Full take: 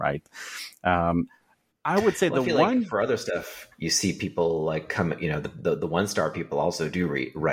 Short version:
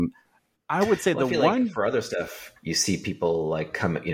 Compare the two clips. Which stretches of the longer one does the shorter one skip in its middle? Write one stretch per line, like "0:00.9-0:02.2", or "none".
none